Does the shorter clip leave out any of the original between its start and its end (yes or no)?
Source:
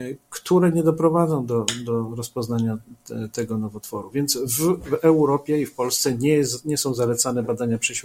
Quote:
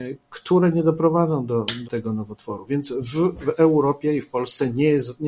yes